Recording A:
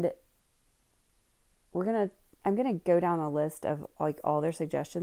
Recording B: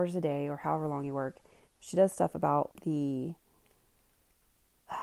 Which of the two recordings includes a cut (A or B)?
B